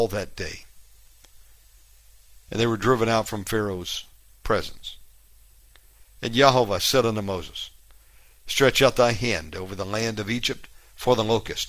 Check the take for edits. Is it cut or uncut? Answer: cut